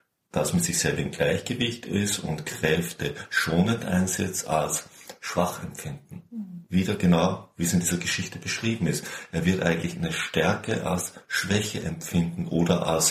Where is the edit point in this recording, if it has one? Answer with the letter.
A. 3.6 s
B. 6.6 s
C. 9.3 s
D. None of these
D